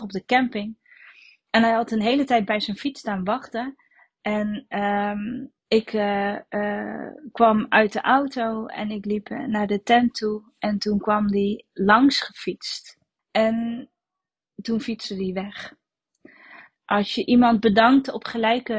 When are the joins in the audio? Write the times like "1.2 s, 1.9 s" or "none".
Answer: 5.6 s, 13.2 s, 16.8 s